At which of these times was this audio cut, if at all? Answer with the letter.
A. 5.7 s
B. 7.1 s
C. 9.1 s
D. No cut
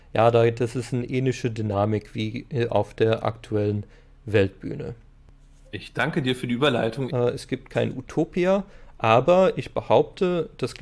B